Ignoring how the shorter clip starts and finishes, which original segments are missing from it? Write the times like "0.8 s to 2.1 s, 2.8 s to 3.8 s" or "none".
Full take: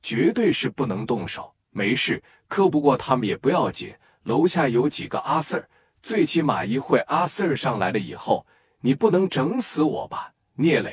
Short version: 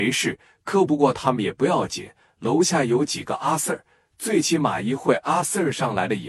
none